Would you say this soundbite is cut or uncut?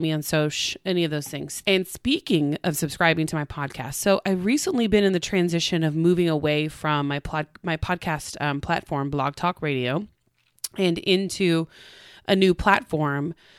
cut